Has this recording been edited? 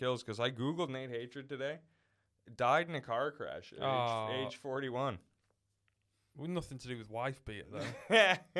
no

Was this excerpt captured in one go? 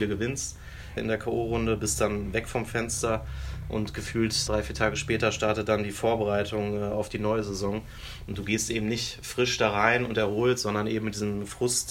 no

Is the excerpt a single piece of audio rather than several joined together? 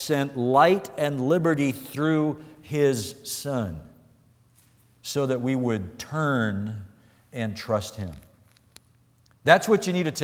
yes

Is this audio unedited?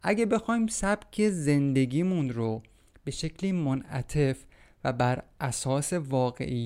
yes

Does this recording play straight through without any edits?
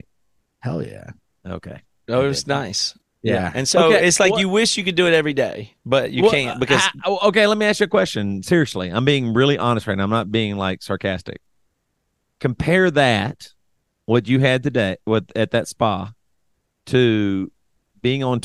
yes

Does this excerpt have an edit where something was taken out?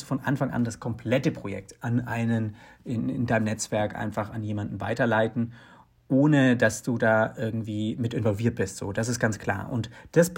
no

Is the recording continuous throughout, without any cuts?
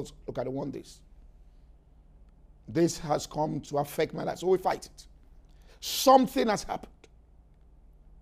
no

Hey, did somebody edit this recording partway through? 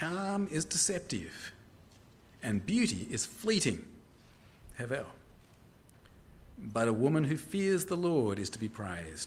no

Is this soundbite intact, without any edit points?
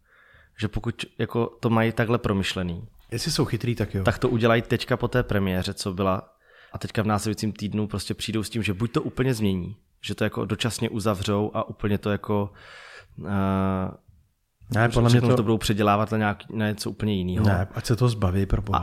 no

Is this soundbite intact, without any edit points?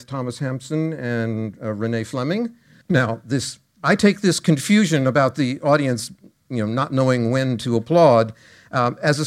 no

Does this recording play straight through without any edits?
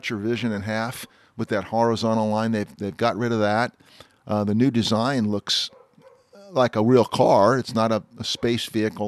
yes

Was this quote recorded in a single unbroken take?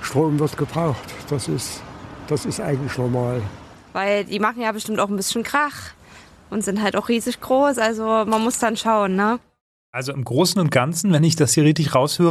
yes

